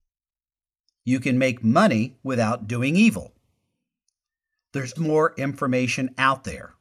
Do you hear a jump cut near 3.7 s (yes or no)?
no